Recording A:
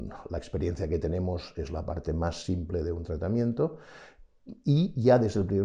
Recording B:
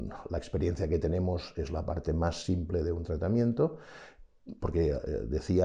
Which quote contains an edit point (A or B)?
B